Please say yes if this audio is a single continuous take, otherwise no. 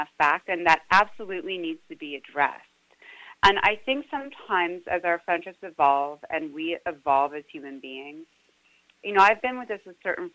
yes